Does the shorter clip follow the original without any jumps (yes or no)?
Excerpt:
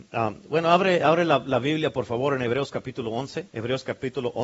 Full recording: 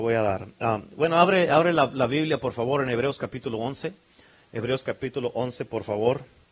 no